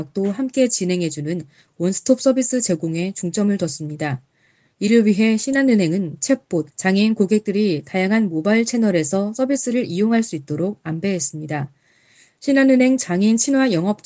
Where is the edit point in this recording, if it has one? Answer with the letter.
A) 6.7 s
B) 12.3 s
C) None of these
A